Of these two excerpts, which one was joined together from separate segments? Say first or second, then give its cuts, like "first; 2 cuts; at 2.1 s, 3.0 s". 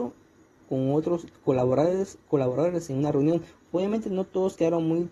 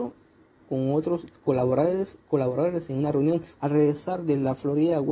second; 1 cut; at 3.5 s